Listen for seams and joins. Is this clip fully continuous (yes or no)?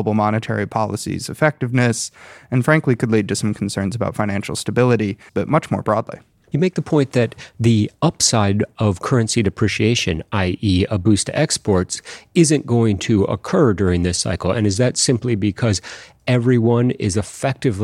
no